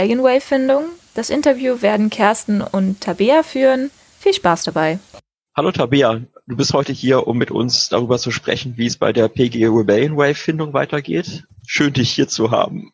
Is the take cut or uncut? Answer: uncut